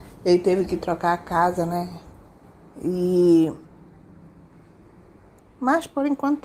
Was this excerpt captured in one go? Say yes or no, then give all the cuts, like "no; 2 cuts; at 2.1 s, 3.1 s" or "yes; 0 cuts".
no; 1 cut; at 5.4 s